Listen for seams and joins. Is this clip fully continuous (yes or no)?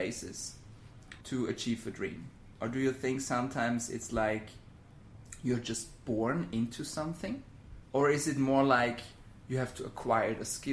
no